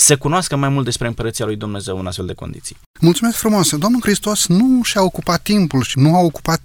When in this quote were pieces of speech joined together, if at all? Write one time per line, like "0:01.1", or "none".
0:02.9

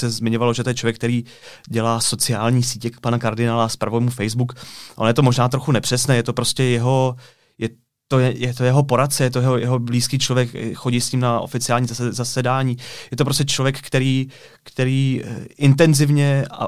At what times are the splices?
none

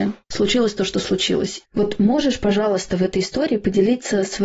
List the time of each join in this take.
0:01.6

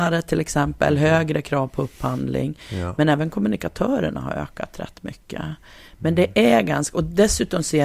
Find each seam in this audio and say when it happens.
none

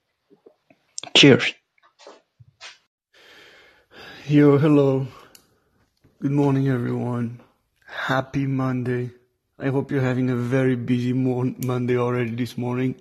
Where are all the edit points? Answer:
none

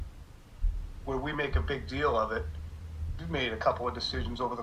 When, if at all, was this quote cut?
0:03.2

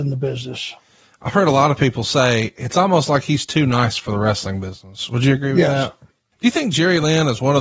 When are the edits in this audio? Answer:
0:06.3

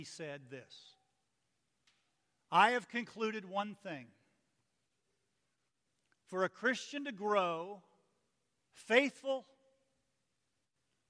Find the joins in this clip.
0:08.6

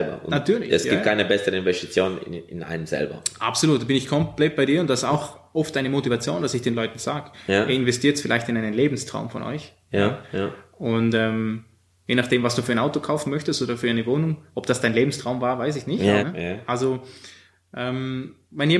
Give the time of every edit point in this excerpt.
0:16.2

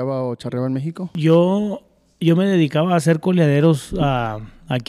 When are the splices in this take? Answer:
none

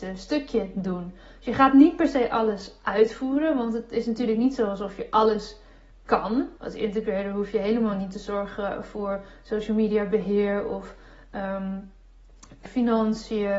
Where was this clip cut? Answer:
0:06.6
0:12.7

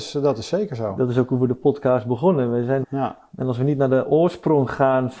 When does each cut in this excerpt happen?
0:02.8

